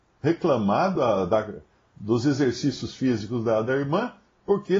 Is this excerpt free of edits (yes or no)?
yes